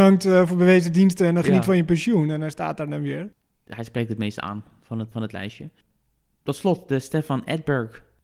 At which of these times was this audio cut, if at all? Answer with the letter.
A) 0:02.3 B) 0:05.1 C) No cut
B